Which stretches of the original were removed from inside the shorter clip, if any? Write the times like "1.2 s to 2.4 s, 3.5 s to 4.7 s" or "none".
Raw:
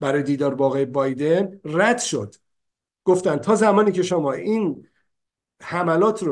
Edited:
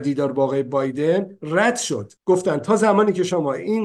2.4 s to 3.0 s